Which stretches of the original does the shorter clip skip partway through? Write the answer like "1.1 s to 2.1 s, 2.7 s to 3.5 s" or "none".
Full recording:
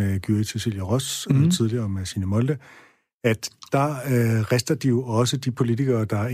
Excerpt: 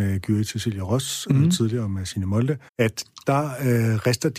2.7 s to 3.1 s